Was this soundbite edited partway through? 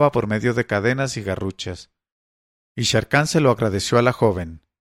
yes; 1 cut; at 2.7 s

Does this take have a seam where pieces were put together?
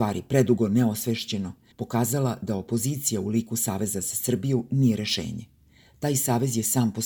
no; 0 cuts

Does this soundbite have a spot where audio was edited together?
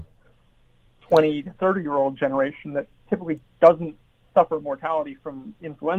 no; 0 cuts

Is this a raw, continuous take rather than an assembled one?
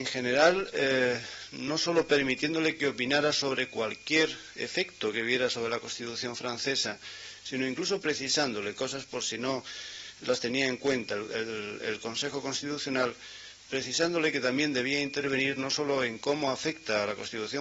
yes; 0 cuts

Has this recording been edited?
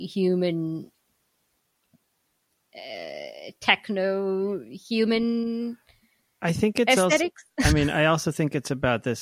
no; 0 cuts

